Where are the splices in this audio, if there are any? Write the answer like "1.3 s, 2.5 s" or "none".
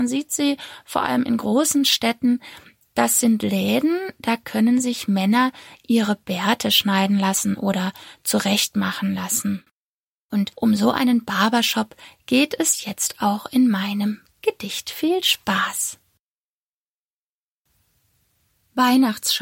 none